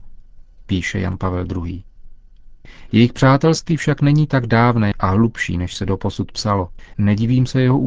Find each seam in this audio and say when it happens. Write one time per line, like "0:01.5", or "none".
0:04.9
0:06.9